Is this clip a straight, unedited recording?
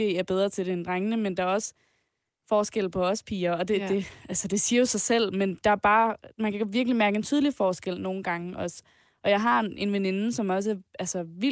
yes; 0 cuts

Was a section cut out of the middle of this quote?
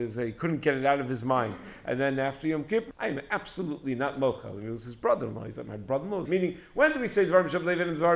yes; 2 cuts; at 2.9 s, 6.2 s

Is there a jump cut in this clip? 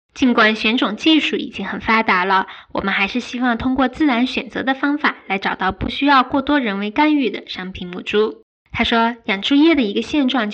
yes; 1 cut; at 8.5 s

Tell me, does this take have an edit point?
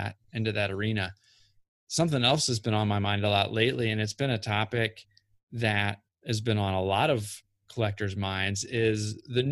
no; 0 cuts

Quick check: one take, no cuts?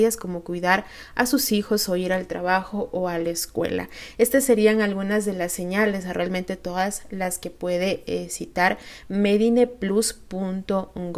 yes; 0 cuts

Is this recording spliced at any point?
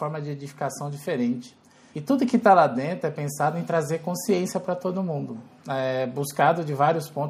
yes; 1 cut; at 1.9 s

